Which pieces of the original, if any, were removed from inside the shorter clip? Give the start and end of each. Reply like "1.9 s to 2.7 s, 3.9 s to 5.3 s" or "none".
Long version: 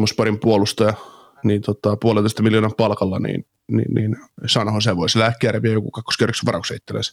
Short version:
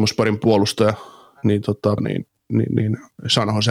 2.0 s to 3.2 s